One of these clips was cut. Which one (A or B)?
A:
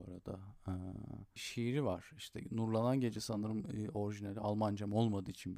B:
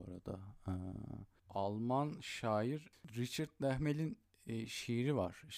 A